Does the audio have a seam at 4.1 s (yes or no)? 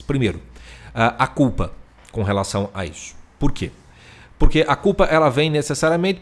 no